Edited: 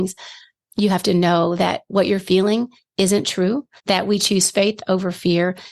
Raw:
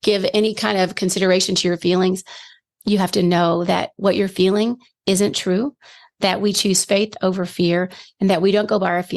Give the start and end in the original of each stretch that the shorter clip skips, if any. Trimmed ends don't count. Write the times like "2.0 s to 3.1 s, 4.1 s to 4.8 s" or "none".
5.9 s to 6.1 s